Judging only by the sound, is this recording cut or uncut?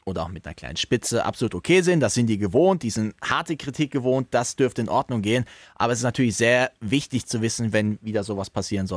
cut